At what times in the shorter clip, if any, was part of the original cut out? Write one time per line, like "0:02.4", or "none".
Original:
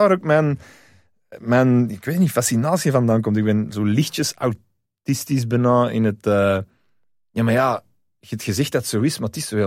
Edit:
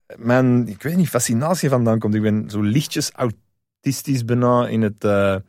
none